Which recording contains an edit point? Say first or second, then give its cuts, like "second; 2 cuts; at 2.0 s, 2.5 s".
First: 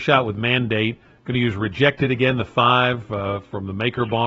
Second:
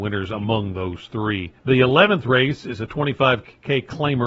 second; 1 cut; at 1.6 s